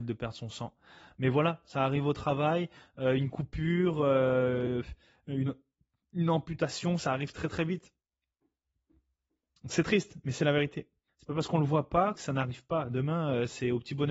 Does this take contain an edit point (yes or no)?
yes